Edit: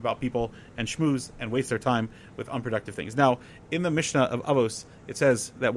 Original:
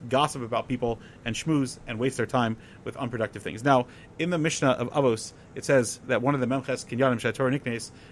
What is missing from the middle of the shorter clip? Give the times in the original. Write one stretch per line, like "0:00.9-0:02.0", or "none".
none

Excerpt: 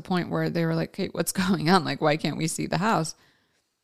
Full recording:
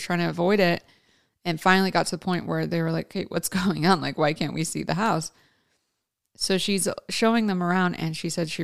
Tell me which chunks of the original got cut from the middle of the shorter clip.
none

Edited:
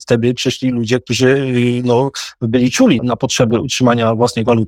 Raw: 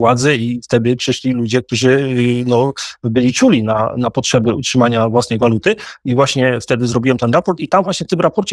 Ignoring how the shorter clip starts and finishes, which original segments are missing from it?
0:03.6-0:03.9

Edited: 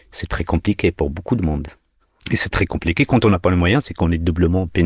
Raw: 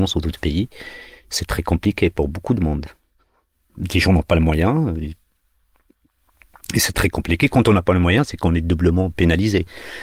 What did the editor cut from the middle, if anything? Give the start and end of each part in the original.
0:03.4-0:06.6

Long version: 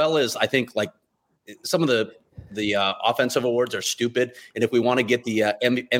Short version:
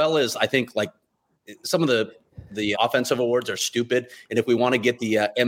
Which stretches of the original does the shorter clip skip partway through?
0:02.7-0:03.0

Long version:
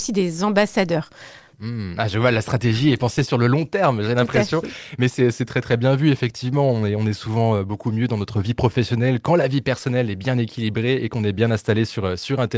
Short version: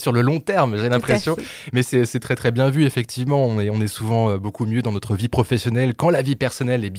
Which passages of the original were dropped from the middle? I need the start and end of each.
none

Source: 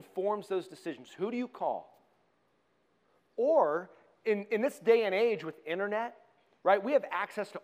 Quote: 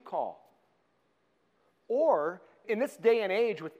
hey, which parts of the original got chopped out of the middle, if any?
0:04.1-0:04.5

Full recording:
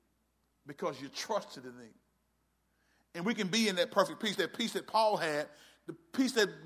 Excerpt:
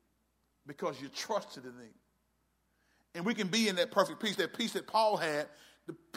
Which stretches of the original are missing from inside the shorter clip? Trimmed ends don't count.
none

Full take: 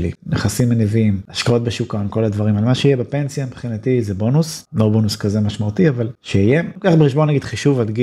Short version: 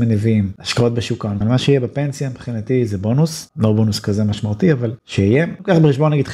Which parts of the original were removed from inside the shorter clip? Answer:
0:02.1-0:02.6

